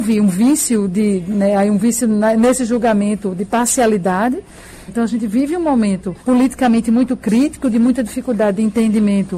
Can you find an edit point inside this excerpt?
yes; 2 cuts; at 4.9 s, 6.2 s

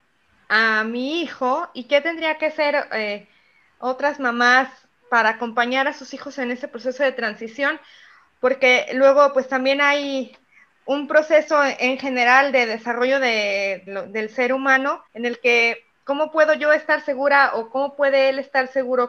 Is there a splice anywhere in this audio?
yes; 2 cuts; at 13.9 s, 15.1 s

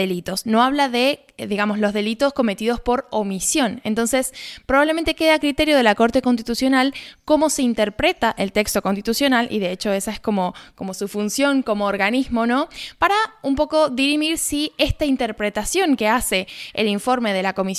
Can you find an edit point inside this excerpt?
no; 0 cuts

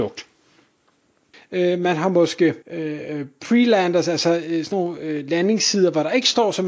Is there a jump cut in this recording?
yes; 2 cuts; at 1.3 s, 2.6 s

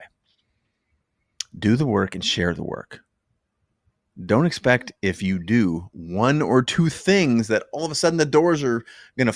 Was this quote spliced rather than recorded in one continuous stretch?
no; 0 cuts

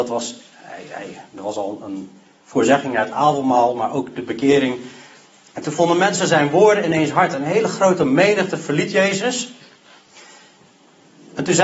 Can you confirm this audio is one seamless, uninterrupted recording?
yes; 0 cuts

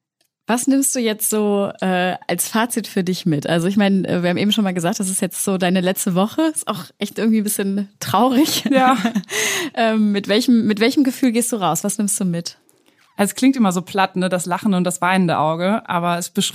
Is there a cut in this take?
no; 0 cuts

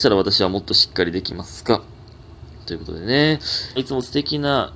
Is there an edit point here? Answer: yes; 1 cut; at 3.8 s

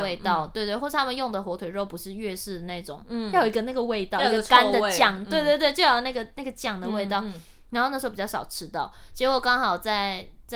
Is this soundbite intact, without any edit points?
yes; 0 cuts

